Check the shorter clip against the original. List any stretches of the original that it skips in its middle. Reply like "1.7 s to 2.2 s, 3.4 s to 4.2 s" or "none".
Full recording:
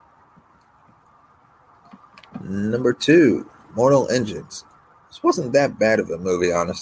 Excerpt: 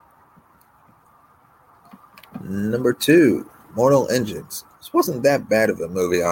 4.7 s to 5.0 s